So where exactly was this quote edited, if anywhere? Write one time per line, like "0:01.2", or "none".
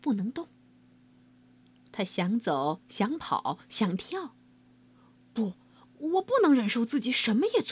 none